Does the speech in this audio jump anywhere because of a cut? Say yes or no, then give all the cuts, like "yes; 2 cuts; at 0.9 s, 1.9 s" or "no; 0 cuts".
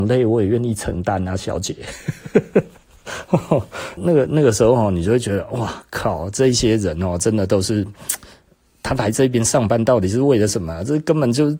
yes; 1 cut; at 4.0 s